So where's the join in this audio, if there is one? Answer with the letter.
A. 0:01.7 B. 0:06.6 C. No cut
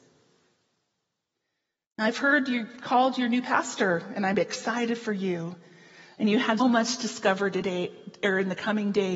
B